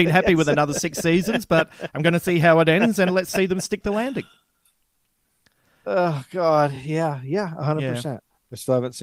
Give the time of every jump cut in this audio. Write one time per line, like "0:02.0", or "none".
none

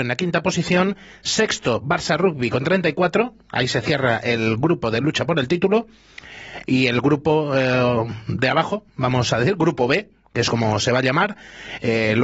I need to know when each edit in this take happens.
none

